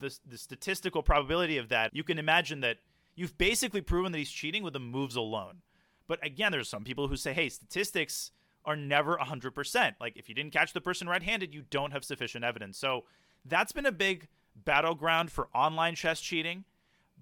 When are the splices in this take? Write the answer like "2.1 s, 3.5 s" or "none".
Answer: 1.9 s